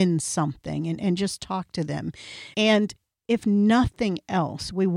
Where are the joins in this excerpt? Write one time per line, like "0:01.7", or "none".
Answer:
0:02.5